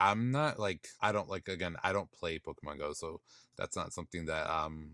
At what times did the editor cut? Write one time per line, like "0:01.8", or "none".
0:01.0